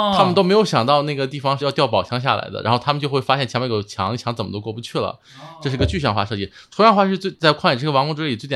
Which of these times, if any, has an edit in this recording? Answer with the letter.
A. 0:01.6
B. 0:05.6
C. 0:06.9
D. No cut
A